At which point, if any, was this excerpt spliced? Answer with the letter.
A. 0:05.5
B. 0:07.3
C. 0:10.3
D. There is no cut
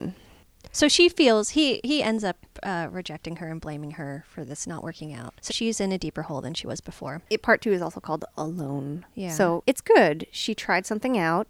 A